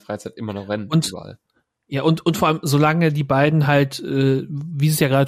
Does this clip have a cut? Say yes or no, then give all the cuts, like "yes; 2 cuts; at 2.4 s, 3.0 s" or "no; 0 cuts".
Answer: no; 0 cuts